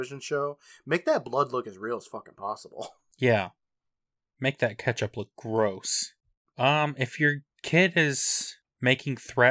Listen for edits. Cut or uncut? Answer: uncut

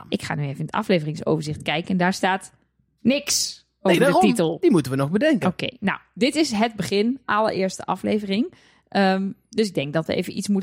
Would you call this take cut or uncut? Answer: uncut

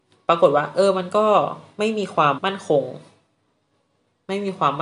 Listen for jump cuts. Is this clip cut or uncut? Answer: cut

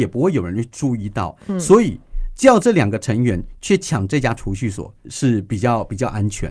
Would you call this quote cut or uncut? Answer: cut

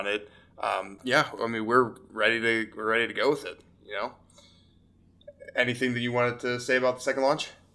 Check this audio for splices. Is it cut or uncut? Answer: cut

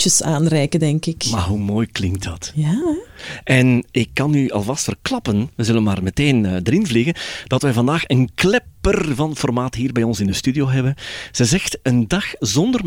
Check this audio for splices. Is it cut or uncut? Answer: uncut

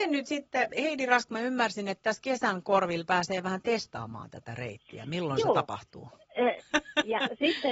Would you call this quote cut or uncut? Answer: cut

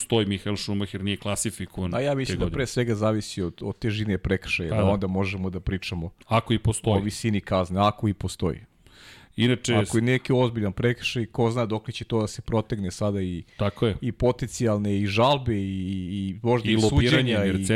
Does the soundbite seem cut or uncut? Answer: uncut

